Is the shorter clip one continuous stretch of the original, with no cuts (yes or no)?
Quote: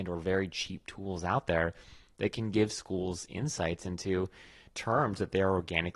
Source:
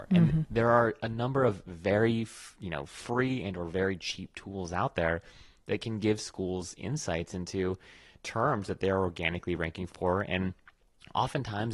yes